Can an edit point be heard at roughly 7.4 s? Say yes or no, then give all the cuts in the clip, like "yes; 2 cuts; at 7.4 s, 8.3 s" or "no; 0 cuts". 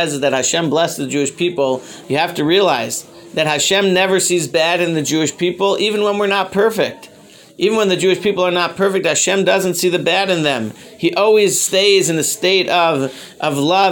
no; 1 cut; at 2.0 s